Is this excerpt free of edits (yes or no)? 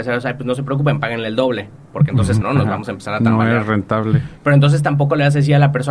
no